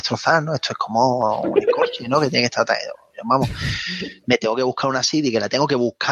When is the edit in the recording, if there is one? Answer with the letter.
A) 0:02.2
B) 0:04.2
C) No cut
C